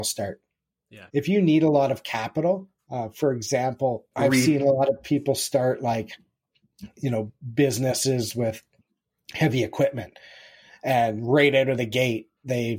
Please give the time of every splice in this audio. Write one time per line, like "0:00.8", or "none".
0:01.1
0:04.1